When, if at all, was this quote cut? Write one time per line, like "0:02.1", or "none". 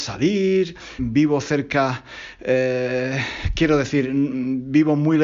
0:01.0